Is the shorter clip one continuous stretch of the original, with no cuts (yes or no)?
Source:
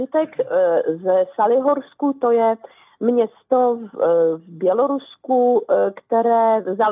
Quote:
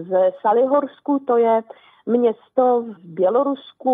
no